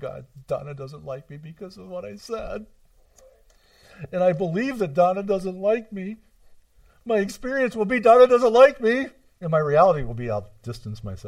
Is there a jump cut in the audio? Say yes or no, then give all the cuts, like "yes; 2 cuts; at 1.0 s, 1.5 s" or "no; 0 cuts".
no; 0 cuts